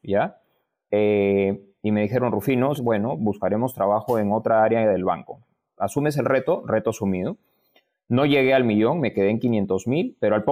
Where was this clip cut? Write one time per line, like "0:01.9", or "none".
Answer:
0:02.8